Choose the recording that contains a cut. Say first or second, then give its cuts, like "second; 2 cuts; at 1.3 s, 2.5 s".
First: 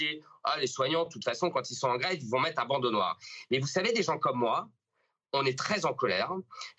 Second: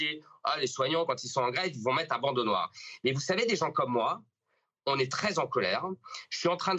second; 1 cut; at 1.1 s